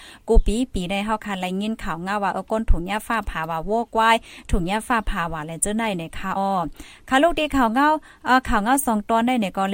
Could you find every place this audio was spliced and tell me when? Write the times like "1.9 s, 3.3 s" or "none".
6.4 s